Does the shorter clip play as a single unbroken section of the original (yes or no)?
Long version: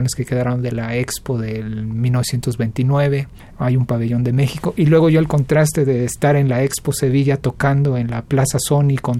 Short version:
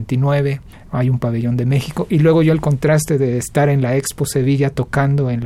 yes